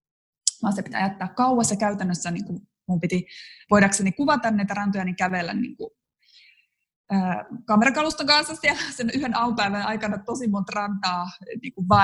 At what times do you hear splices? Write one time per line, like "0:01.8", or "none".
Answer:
none